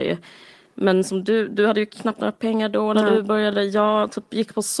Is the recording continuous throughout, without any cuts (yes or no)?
yes